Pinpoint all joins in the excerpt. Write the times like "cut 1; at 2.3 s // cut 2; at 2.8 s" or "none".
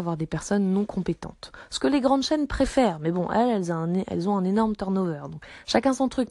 none